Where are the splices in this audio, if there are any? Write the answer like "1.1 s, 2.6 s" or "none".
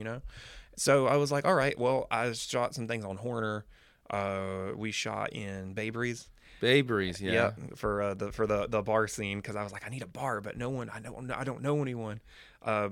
none